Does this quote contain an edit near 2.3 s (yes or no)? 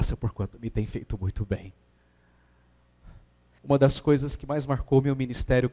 no